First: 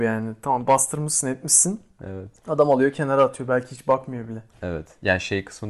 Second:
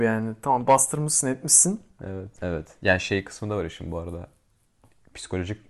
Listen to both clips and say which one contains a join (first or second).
second